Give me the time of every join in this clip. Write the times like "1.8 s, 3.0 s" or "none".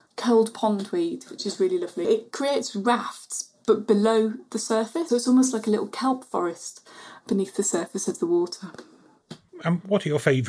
2.0 s, 5.1 s, 9.5 s